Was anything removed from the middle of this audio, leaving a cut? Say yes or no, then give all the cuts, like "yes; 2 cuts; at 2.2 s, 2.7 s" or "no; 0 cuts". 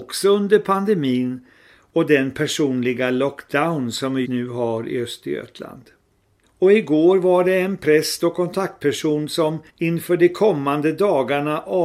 yes; 3 cuts; at 4.2 s, 6.4 s, 9.7 s